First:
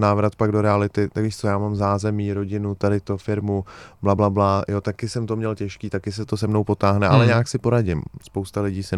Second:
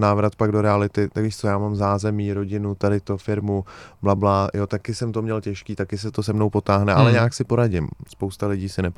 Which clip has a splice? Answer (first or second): second